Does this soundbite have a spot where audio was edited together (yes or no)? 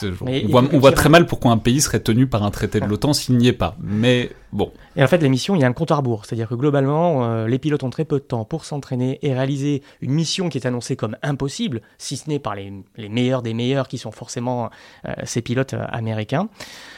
no